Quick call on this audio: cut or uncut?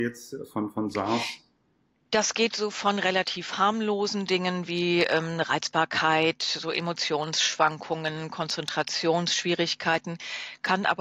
uncut